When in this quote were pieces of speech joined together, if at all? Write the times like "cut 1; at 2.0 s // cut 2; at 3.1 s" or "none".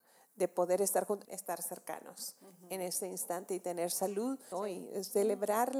cut 1; at 1.2 s // cut 2; at 4.5 s